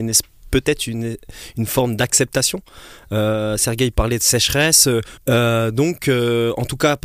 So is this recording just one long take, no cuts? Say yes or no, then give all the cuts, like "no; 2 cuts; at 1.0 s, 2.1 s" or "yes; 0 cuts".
no; 1 cut; at 5.2 s